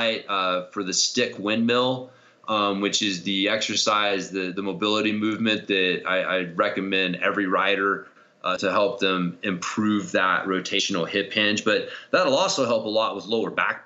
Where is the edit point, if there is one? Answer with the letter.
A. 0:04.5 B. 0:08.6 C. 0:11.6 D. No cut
B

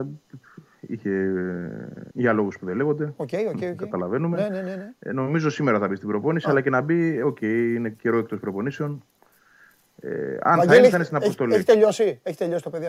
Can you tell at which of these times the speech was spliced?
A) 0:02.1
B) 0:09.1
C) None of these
A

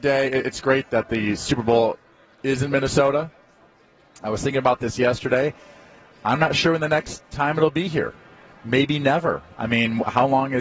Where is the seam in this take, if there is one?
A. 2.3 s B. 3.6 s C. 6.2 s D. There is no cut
D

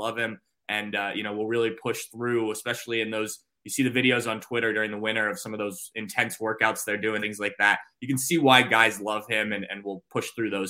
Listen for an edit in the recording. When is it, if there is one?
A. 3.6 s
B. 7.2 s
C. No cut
B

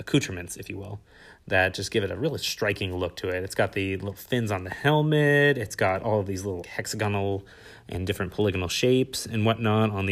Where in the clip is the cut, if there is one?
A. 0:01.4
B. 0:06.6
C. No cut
B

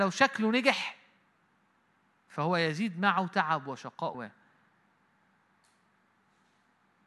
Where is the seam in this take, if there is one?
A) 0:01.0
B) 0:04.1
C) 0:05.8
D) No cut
B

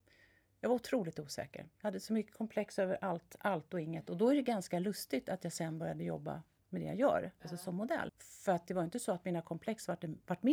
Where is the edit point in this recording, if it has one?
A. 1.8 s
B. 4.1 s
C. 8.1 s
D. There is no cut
C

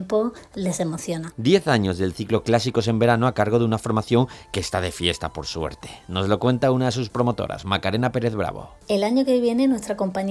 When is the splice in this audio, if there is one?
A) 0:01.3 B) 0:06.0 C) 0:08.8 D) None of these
A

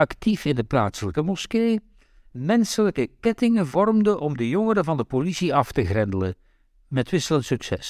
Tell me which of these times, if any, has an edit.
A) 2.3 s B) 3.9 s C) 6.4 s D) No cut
D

